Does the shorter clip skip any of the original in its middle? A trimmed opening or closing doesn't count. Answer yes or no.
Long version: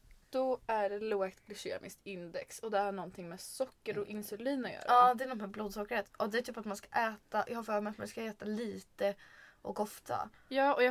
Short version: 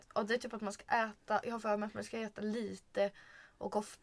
no